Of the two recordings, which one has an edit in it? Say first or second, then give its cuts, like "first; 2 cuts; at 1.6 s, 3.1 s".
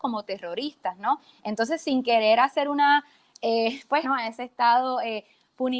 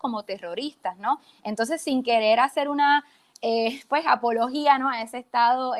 first; 1 cut; at 4.0 s